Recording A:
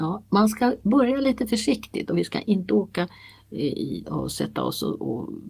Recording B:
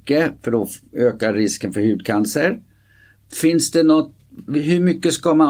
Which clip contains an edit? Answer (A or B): A